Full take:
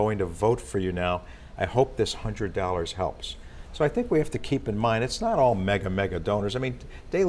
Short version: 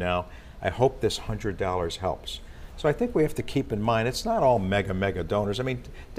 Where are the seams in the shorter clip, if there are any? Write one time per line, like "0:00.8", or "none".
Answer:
none